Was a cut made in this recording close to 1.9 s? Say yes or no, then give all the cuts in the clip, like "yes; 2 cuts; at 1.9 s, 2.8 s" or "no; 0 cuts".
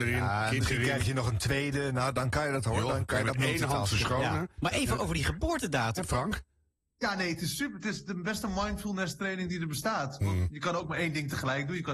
no; 1 cut; at 6.0 s